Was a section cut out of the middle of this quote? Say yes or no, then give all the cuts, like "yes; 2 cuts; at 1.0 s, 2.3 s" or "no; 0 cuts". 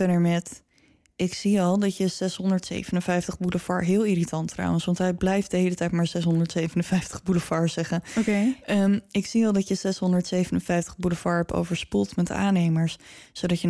no; 0 cuts